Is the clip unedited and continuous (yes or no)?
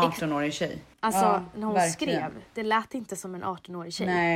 no